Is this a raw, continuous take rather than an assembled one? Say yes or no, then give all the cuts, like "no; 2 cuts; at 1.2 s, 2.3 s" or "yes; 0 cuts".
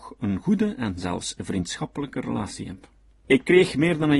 no; 1 cut; at 3.2 s